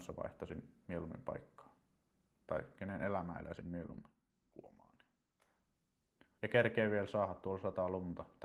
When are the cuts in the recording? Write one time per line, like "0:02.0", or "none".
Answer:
0:06.4